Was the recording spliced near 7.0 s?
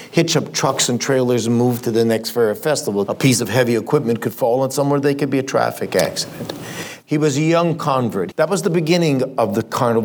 yes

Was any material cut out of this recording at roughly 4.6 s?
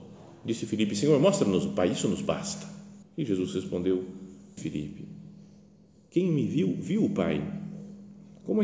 yes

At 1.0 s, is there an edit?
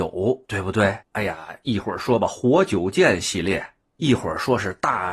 yes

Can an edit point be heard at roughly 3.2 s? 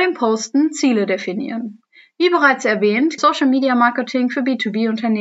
yes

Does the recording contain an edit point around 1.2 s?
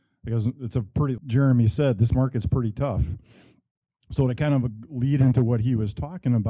yes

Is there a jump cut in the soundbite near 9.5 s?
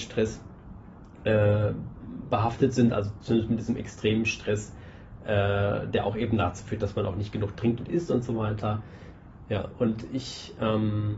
yes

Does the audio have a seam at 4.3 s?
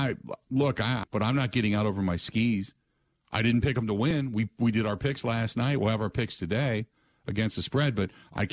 no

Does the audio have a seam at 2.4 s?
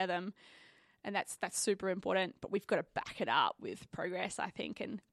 no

